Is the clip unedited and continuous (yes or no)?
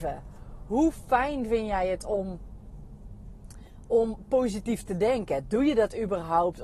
yes